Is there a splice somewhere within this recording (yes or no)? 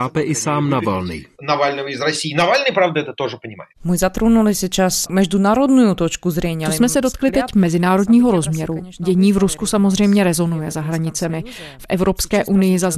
yes